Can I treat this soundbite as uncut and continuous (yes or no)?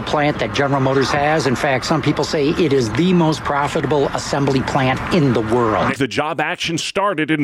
no